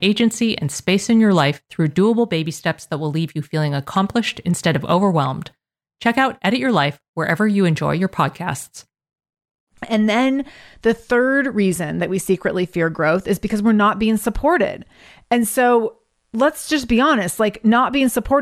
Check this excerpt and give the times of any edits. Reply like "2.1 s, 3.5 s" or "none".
none

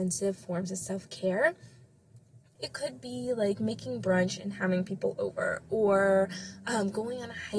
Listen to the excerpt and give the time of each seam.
2.6 s

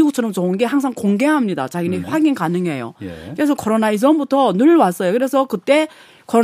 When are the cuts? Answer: 2.0 s

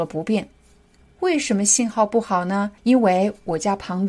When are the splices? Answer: 1.0 s, 2.8 s

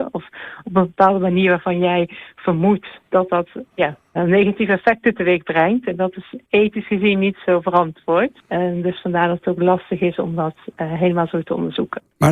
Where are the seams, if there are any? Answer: 4.2 s

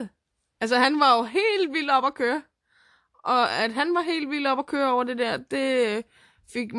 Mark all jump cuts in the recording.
none

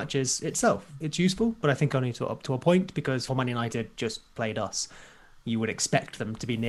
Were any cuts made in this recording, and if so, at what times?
3.3 s

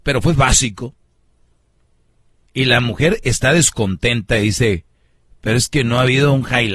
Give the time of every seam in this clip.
2.5 s

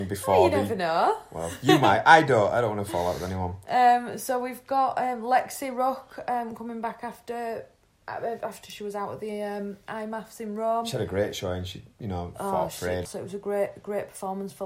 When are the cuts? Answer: 13.1 s

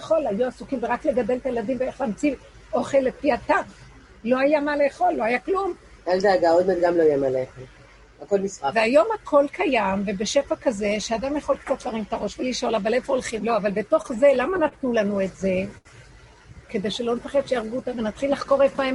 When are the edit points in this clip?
6.0 s, 13.4 s, 17.9 s

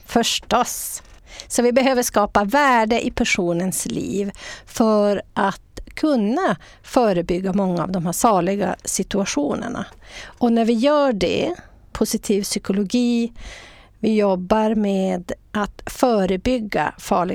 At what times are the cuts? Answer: 11.9 s

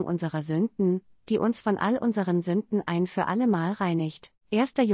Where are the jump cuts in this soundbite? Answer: none

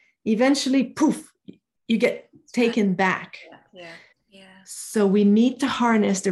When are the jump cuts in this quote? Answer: 4.1 s

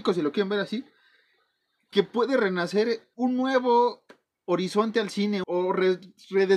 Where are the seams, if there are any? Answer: 3.1 s, 5.4 s

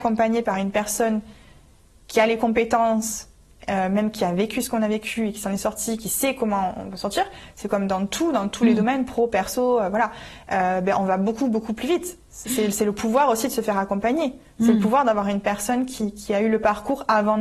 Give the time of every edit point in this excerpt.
none

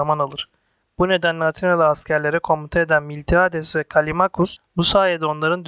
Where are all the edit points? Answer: 4.7 s

